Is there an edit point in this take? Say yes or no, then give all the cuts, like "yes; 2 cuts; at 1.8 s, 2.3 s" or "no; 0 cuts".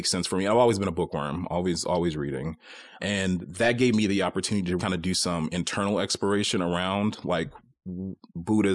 yes; 2 cuts; at 3.0 s, 4.8 s